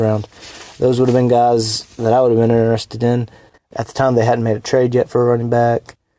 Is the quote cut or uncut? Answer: cut